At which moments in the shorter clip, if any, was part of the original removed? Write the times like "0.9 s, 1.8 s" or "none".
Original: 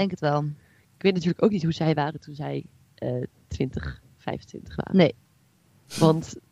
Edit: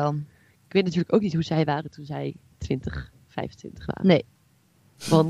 2.5 s